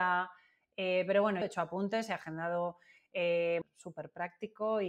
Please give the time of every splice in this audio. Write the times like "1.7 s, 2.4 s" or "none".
1.4 s, 3.6 s